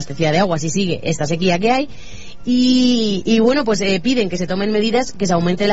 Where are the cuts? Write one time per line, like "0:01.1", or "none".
none